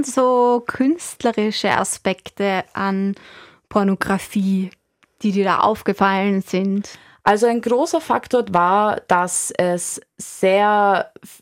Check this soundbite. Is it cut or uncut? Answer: uncut